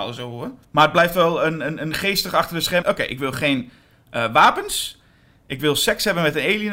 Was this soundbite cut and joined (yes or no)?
yes